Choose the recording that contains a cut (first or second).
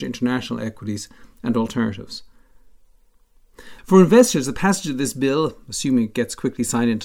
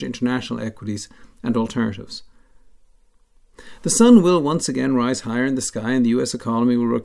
first